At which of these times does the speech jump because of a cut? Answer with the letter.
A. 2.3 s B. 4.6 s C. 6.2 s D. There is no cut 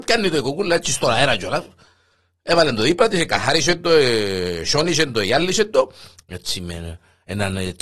C